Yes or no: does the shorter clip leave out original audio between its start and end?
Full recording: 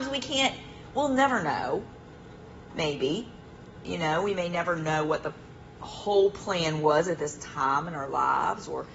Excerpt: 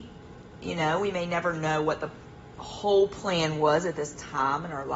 no